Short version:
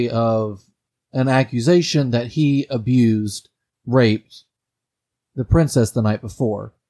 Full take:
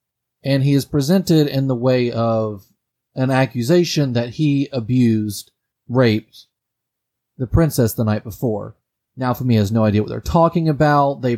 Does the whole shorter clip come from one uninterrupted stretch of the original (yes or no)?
yes